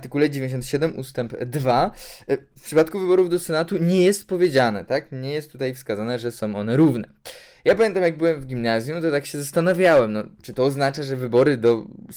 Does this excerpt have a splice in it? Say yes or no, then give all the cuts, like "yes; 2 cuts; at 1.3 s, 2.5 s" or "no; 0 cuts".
no; 0 cuts